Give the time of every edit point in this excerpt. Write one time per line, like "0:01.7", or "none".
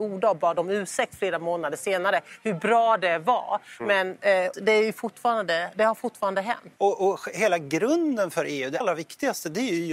0:04.5
0:06.8
0:08.8